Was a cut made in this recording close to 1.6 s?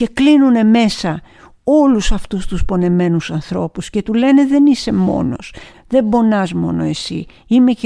no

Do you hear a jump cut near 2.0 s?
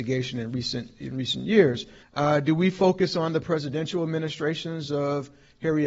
yes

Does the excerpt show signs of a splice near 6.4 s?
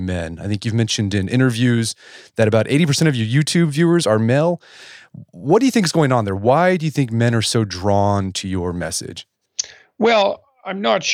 no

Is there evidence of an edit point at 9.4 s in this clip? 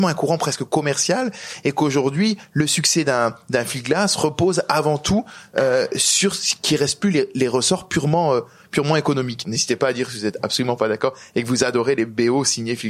yes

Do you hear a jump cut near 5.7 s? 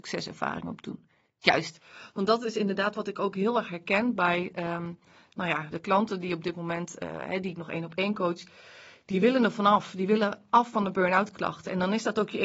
yes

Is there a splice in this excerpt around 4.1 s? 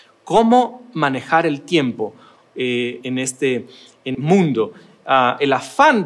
yes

